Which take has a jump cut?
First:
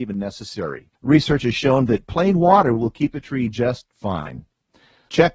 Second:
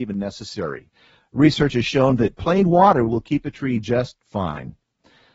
first; 1 cut; at 1.0 s

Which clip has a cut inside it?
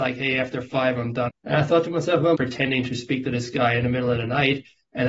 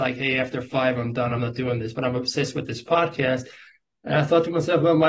first; 2 cuts; at 1.3 s, 2.3 s

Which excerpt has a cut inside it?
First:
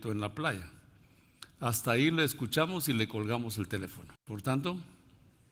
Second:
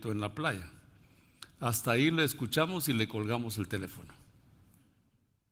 first; 1 cut; at 4.2 s

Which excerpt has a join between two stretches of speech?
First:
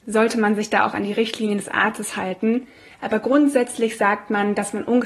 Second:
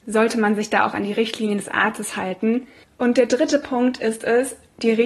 second; 1 cut; at 2.8 s

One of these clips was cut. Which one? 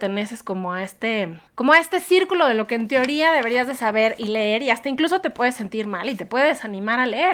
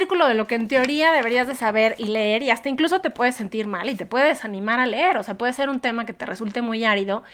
first; 1 cut; at 1.5 s

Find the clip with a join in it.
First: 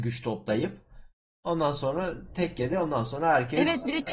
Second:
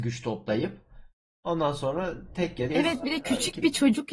second; 1 cut; at 2.7 s

